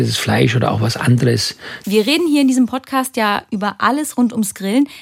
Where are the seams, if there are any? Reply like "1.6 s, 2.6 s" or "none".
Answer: 1.8 s